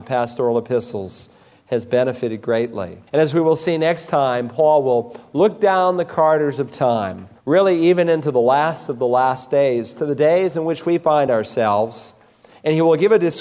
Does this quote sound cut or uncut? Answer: cut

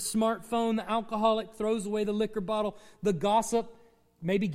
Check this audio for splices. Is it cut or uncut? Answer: uncut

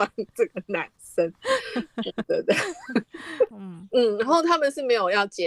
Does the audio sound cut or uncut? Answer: cut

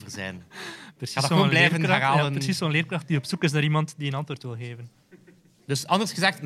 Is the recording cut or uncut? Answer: cut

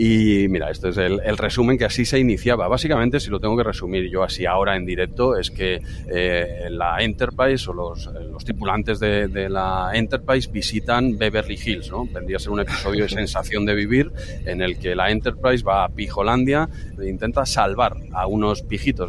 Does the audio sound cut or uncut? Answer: uncut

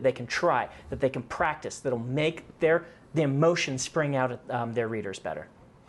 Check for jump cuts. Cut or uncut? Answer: uncut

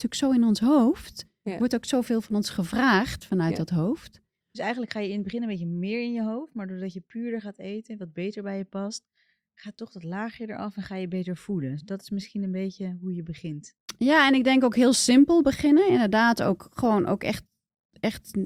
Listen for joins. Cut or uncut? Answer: uncut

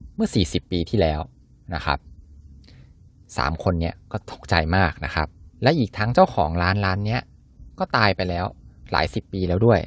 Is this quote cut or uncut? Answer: cut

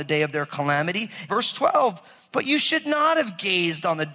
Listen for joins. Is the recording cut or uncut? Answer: cut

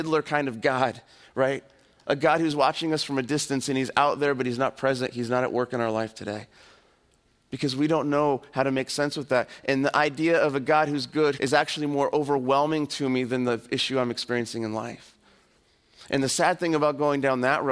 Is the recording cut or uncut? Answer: cut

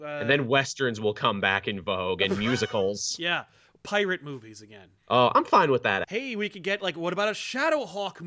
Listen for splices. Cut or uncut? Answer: cut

